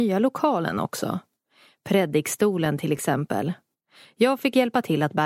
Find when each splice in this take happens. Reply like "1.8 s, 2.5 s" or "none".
none